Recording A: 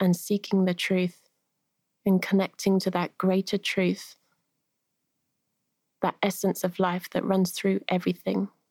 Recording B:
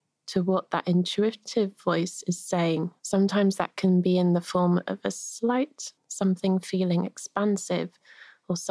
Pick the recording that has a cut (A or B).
B